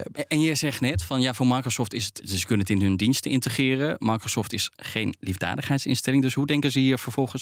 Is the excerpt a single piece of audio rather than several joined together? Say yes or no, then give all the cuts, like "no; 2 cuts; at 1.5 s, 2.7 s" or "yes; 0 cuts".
no; 1 cut; at 2.2 s